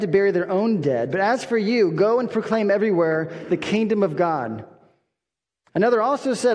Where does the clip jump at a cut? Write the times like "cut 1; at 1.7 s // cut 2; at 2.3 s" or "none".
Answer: none